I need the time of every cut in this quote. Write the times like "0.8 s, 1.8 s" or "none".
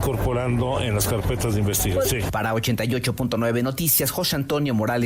2.0 s